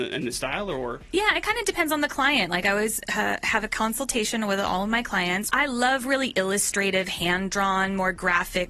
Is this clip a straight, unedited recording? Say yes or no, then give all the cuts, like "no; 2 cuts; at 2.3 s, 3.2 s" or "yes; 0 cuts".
no; 1 cut; at 5.5 s